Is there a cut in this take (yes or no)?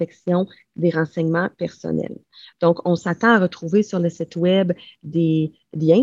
no